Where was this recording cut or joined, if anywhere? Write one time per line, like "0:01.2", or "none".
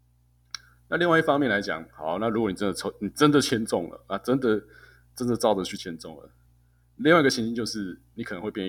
0:05.8